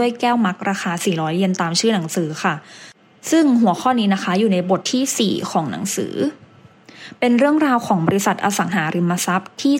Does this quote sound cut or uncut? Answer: cut